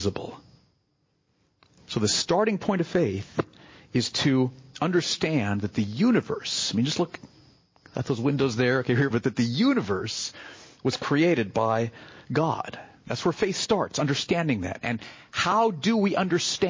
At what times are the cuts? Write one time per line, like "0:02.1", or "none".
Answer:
0:09.1